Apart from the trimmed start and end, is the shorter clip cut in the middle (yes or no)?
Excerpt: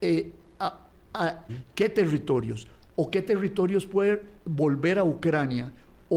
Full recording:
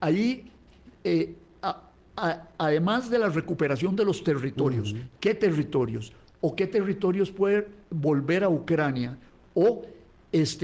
yes